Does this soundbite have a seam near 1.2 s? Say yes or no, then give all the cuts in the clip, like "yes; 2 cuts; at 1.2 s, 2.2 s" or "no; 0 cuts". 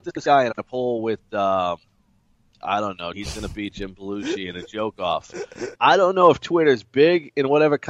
no; 2 cuts; at 3.1 s, 5.8 s